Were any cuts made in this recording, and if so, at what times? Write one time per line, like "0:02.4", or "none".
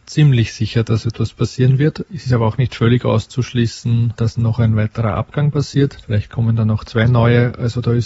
none